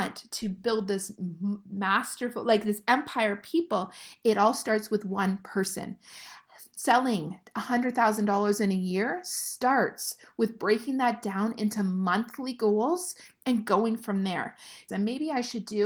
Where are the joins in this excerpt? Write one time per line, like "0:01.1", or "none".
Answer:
0:14.9